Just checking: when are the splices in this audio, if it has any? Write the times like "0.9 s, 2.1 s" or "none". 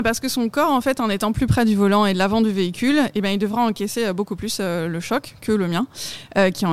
none